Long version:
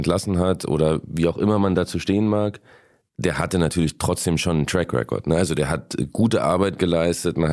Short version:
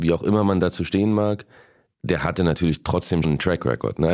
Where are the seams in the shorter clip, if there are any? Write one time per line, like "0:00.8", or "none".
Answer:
0:03.2